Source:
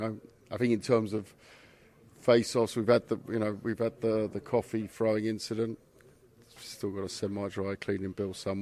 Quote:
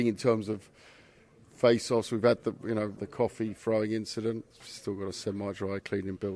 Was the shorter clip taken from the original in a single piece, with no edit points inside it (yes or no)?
no